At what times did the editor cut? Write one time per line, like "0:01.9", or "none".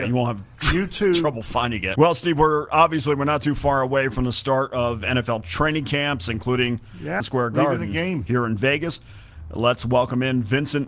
0:02.0
0:07.2
0:08.3